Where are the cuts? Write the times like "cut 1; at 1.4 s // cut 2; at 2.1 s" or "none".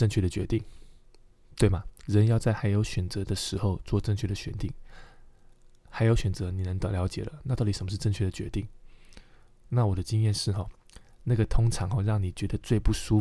none